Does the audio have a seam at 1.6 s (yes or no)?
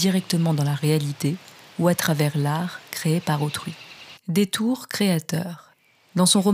no